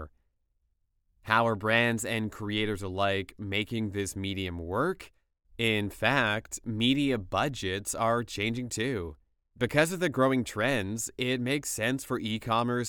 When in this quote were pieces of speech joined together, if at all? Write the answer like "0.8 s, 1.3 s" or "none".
5.4 s, 9.5 s